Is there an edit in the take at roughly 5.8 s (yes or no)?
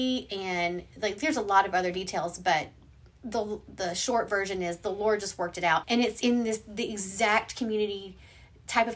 yes